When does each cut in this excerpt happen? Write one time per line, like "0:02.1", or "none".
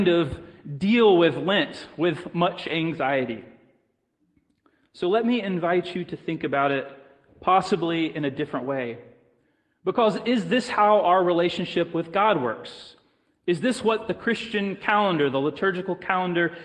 none